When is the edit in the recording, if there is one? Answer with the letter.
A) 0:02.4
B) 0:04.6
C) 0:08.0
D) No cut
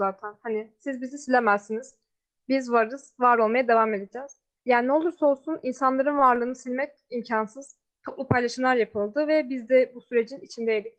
C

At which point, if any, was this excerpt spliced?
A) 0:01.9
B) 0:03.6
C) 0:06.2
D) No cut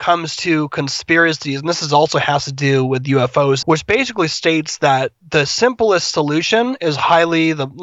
B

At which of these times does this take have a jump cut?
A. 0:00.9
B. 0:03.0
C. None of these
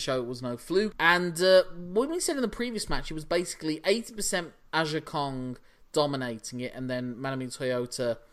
A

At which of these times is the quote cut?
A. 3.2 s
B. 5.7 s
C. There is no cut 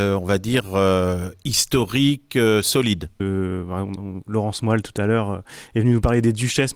A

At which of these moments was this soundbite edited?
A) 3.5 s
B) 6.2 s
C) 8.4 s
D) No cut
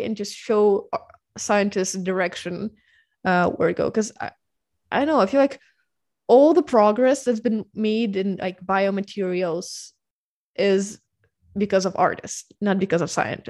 D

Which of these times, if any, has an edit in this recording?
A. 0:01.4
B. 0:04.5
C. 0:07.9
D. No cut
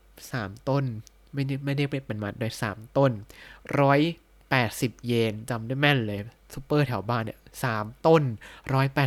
D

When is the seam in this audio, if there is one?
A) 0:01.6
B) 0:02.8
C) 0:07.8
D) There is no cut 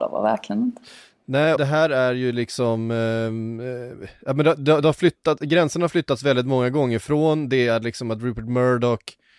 A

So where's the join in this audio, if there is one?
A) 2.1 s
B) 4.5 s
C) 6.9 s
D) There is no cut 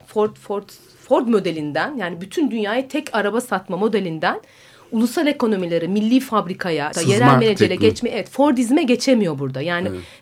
C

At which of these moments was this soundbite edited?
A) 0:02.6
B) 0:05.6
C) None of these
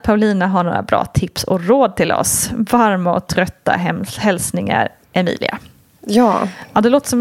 C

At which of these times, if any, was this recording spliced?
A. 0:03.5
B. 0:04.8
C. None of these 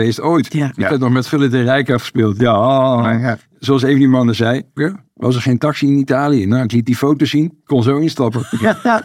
B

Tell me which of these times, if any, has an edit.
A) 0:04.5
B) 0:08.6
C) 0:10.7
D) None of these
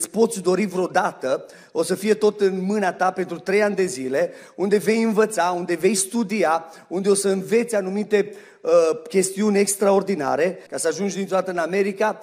C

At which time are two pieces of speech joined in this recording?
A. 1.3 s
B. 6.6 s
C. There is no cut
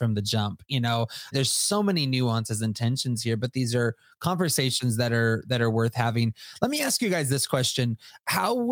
A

